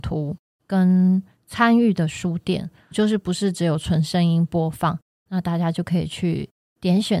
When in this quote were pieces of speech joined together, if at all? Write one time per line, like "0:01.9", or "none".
0:02.9
0:05.2